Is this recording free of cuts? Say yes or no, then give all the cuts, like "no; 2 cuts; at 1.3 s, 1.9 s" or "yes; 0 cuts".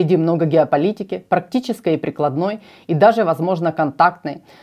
yes; 0 cuts